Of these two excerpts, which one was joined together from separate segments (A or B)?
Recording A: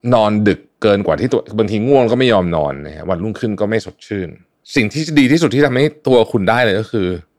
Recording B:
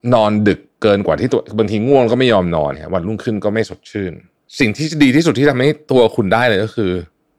B